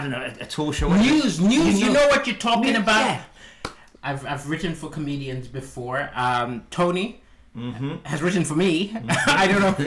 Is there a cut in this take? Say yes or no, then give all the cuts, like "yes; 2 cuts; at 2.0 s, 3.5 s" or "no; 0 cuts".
yes; 1 cut; at 3.9 s